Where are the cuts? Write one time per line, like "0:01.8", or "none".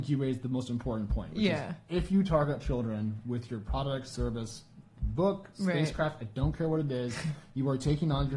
none